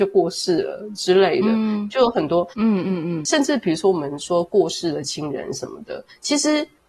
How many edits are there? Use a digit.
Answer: 1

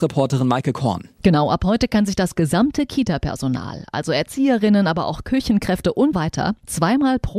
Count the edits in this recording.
1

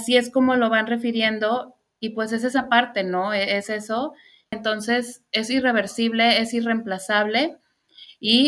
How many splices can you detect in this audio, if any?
1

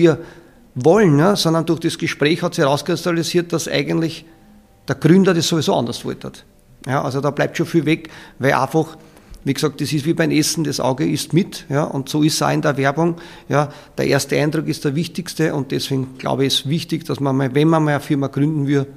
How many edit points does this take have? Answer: 0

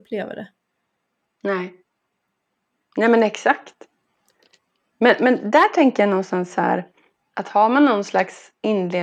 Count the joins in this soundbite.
0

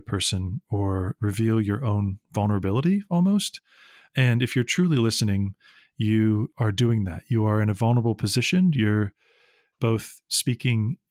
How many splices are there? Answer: 0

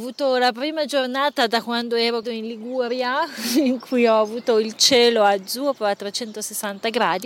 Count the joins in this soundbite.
1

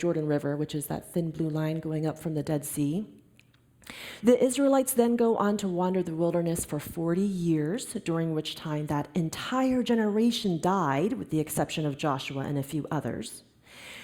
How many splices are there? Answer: 1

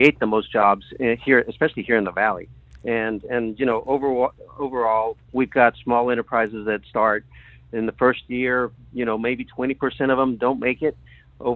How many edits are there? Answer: 1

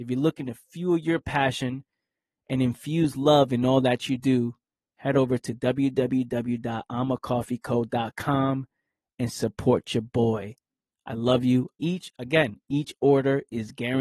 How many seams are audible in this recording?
1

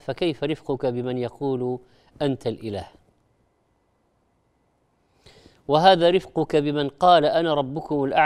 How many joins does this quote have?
0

